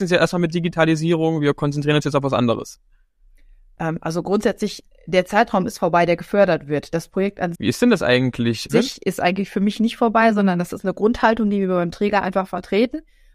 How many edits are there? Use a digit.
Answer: 2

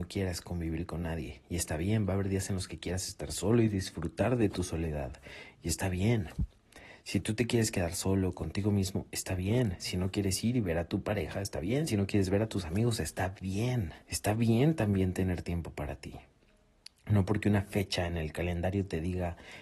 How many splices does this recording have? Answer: 2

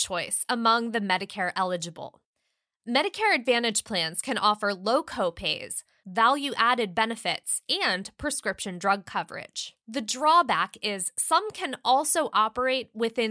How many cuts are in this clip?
2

